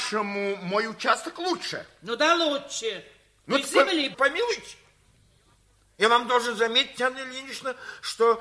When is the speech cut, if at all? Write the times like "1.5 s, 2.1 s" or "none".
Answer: 4.1 s